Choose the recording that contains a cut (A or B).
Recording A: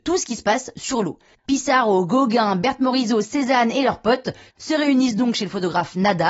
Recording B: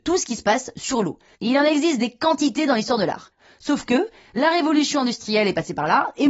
A